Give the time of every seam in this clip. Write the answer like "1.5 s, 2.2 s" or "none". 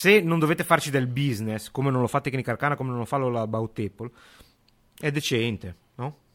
none